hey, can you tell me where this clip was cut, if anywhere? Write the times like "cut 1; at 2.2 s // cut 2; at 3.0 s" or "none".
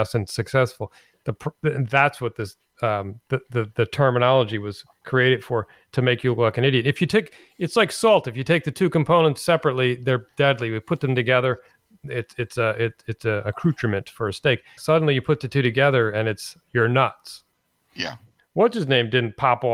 cut 1; at 14.8 s // cut 2; at 18.4 s